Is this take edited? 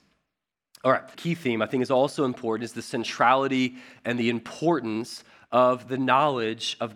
yes; 1 cut; at 1.1 s

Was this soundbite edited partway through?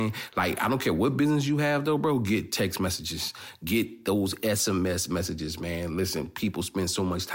no; 0 cuts

